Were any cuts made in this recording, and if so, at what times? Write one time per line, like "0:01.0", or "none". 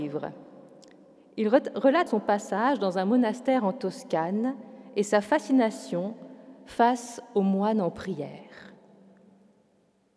0:02.1